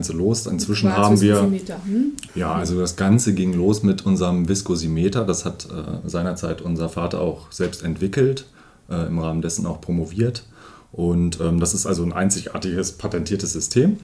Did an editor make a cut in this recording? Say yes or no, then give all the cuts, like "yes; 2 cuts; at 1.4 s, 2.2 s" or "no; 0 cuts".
yes; 1 cut; at 2.3 s